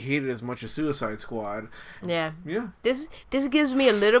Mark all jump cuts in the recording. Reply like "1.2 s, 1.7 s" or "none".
2.0 s, 3.2 s